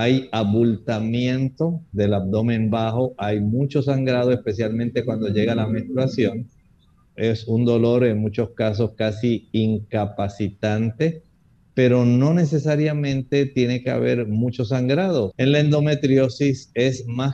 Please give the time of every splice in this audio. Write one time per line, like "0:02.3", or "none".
0:07.0
0:15.3

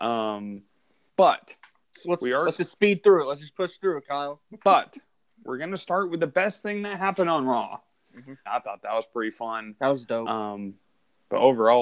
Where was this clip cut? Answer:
0:01.1
0:08.5

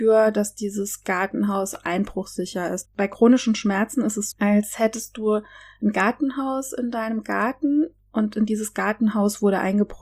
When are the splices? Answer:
0:02.8
0:04.3

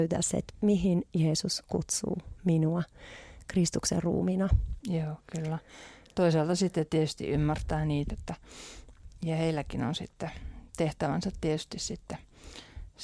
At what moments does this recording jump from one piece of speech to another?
0:04.8
0:08.1

